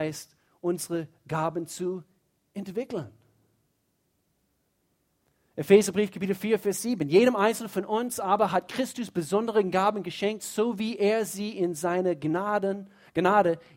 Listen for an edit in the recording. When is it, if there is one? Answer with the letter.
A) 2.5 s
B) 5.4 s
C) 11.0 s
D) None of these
D